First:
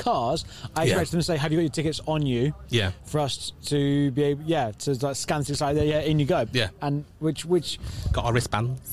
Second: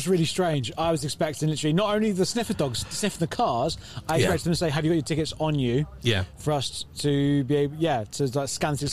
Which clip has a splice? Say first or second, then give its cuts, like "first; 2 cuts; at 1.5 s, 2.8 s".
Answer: first; 1 cut; at 6.5 s